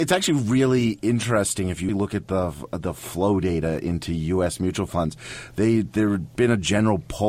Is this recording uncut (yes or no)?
no